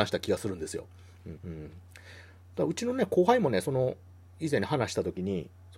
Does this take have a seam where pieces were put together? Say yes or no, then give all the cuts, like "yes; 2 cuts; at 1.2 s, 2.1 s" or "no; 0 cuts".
yes; 1 cut; at 1.4 s